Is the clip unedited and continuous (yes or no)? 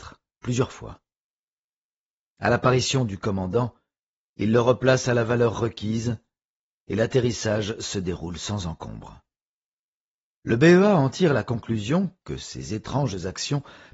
yes